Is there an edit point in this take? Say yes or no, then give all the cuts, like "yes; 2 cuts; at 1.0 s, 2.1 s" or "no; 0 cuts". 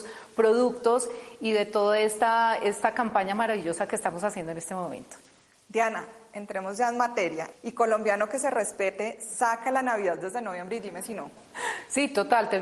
yes; 1 cut; at 7.5 s